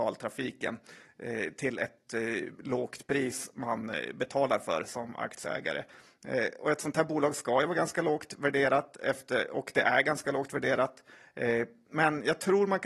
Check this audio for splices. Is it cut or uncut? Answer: uncut